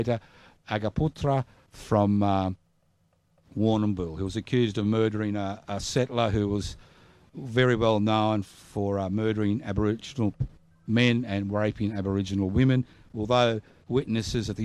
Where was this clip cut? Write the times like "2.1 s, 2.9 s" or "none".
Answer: none